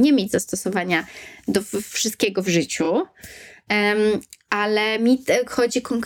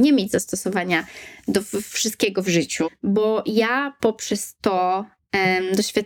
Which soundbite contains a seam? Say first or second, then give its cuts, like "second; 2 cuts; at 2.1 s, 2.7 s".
second; 1 cut; at 2.8 s